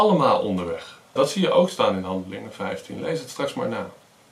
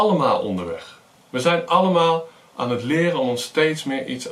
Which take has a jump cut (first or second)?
first